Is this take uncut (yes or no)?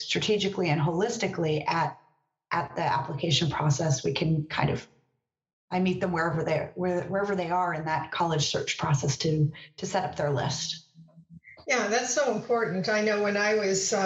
yes